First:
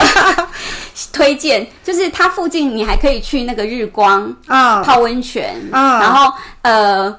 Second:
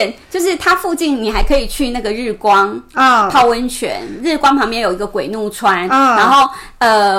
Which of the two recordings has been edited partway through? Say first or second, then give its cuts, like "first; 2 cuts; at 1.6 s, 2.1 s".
first; 1 cut; at 5.7 s